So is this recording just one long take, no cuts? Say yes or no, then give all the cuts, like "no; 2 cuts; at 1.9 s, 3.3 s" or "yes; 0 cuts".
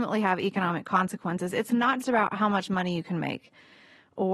no; 1 cut; at 2.0 s